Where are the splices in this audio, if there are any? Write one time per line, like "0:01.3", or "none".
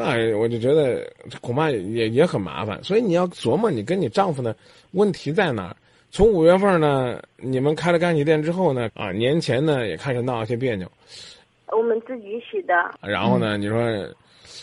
0:08.9
0:13.0